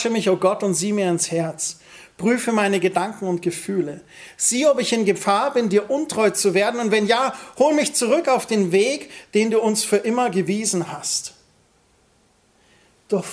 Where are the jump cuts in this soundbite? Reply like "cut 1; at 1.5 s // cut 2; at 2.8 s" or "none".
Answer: none